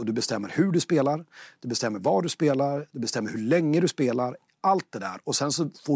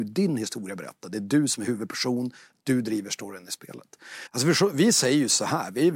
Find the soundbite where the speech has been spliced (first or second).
second